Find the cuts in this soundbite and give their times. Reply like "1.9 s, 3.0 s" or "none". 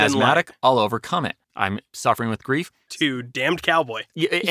1.4 s, 2.9 s